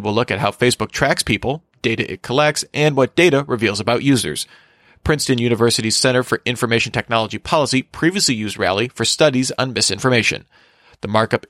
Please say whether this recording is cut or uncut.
uncut